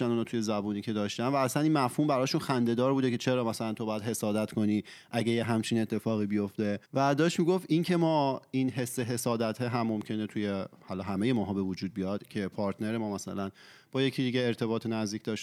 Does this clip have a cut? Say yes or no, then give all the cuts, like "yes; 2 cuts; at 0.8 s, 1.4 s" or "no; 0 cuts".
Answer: yes; 1 cut; at 6.8 s